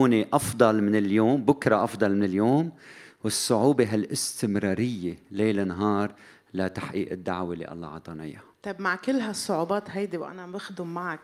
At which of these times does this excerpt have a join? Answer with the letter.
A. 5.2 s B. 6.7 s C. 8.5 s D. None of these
C